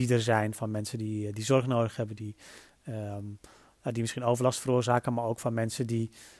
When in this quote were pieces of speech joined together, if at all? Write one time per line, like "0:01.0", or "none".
none